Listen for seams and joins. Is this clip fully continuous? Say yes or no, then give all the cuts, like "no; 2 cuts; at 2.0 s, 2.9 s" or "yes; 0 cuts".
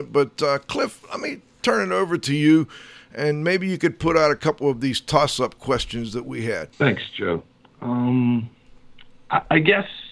no; 1 cut; at 6.7 s